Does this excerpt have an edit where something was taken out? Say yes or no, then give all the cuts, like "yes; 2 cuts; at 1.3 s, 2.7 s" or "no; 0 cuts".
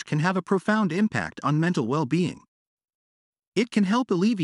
no; 0 cuts